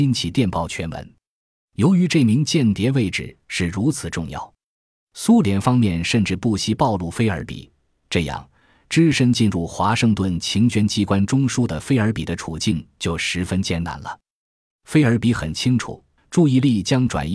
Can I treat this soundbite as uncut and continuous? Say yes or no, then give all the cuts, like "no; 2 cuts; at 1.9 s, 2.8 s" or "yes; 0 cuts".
no; 2 cuts; at 14.7 s, 16.2 s